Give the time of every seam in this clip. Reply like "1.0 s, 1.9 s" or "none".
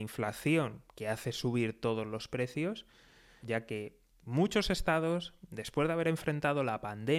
3.4 s